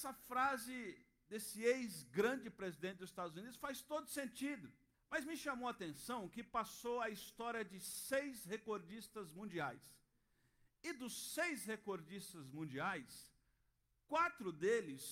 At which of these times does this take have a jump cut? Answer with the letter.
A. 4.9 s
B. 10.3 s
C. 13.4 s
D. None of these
A